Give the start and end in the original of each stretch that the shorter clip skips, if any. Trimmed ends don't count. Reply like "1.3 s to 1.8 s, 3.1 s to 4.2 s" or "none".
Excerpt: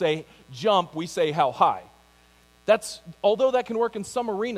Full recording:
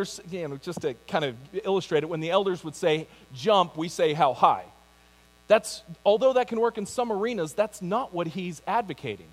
none

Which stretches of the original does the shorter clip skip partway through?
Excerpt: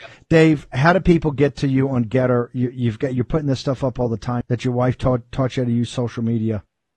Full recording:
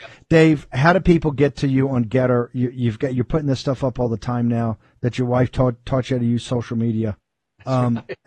4.4 s to 4.9 s

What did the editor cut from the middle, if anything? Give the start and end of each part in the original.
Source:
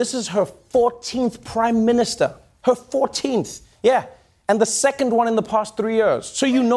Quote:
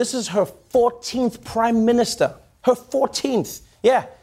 none

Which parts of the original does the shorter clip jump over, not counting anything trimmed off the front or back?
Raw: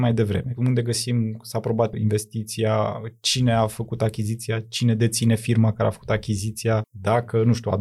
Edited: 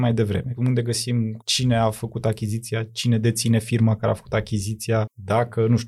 1.4 s to 3.2 s

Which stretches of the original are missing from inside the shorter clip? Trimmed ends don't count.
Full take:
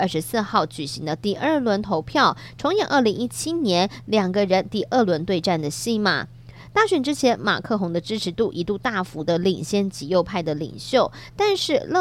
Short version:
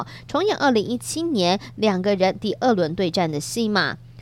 none

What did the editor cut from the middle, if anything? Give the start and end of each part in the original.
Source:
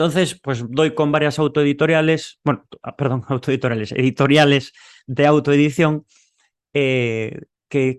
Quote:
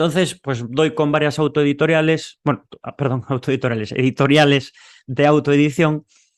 none

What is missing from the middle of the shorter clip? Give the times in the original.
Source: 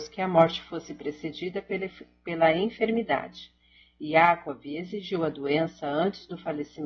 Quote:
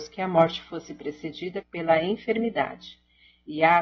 1.6 s to 2.1 s

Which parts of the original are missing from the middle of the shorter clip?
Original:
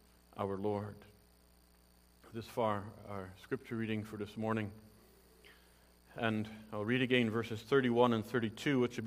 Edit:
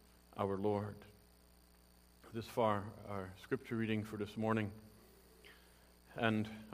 none

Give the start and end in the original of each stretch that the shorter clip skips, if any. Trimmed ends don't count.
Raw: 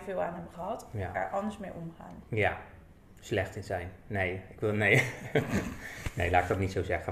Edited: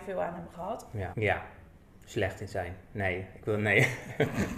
1.1 s to 2.3 s

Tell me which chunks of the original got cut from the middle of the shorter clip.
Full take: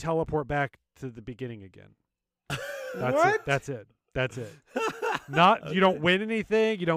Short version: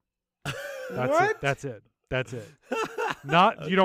none

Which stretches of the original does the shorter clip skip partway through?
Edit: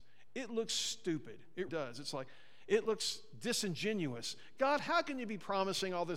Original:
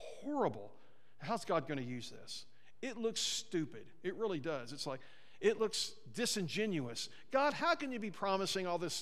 4.2 s to 4.4 s

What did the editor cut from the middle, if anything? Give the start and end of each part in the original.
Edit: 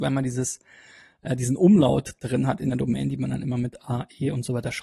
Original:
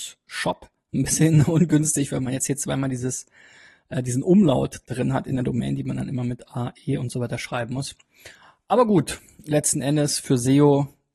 none

